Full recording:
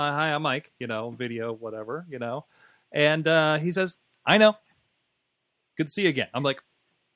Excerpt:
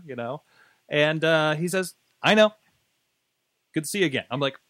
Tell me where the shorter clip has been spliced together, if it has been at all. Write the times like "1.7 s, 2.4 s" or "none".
none